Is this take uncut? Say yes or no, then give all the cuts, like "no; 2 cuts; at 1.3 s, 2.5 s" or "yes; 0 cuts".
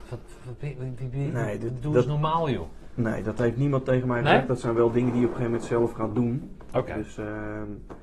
yes; 0 cuts